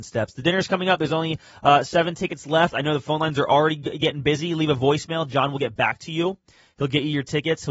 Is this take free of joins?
yes; 0 cuts

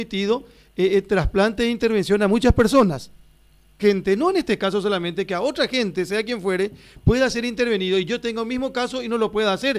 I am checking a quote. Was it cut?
yes; 1 cut; at 3.8 s

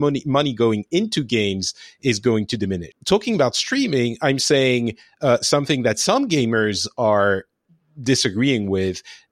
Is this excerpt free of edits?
no; 1 cut; at 2.9 s

